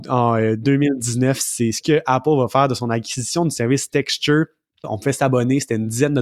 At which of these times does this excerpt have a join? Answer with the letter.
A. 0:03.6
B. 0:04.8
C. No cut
B